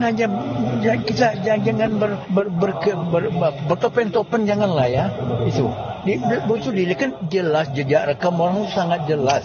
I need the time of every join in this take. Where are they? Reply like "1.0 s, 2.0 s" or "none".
3.0 s